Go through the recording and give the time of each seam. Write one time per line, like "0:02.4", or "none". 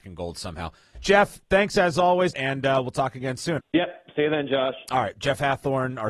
0:02.3
0:03.6